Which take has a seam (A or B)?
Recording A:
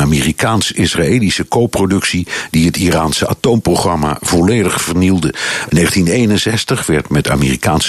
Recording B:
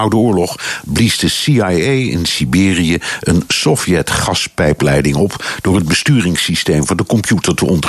A